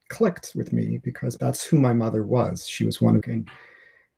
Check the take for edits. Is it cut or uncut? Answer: cut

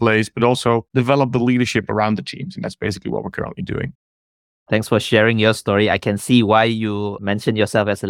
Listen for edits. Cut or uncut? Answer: uncut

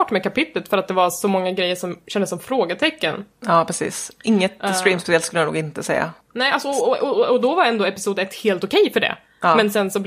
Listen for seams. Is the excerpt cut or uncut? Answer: uncut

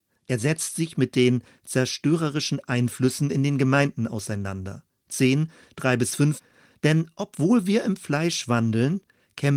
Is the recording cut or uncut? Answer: uncut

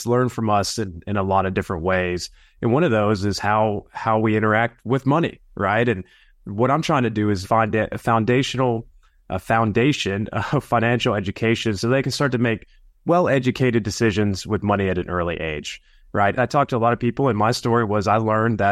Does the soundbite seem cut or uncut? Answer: cut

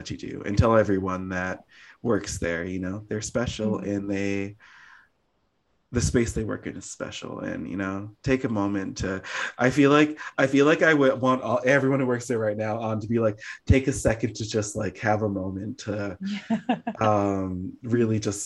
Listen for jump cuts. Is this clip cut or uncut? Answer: uncut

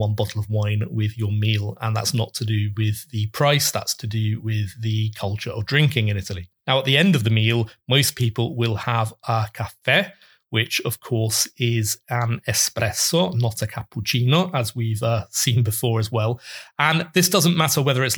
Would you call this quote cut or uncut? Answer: uncut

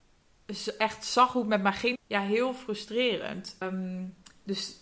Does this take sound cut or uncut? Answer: cut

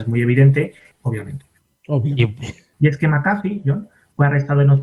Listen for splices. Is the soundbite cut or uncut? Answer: cut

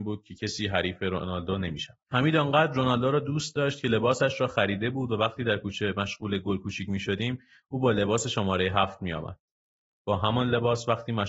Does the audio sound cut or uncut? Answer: cut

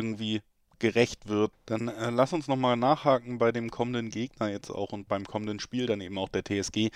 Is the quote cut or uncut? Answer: cut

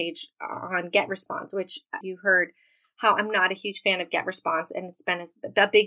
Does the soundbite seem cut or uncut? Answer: cut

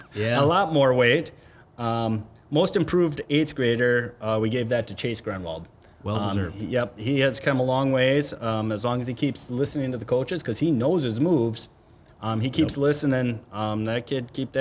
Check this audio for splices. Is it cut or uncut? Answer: uncut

